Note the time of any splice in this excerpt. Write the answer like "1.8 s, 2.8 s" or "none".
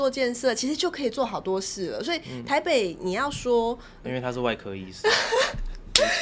4.0 s

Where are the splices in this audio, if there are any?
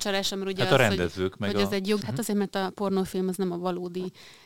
2.0 s

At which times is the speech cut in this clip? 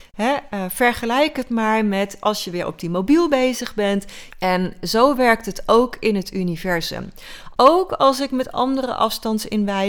4.3 s, 7.5 s

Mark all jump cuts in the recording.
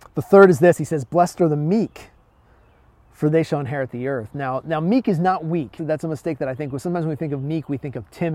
5.8 s

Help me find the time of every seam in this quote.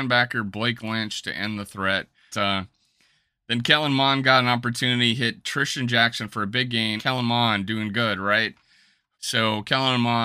2.3 s, 7.0 s, 9.1 s

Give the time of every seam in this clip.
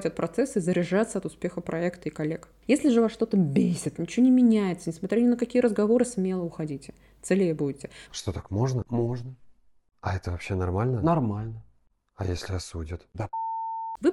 4.0 s, 8.1 s

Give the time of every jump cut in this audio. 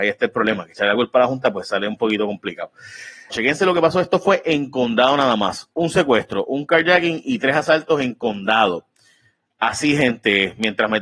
3.3 s

